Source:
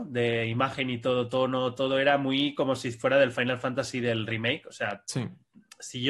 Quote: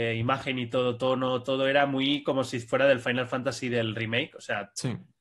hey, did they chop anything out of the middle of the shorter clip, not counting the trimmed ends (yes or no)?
no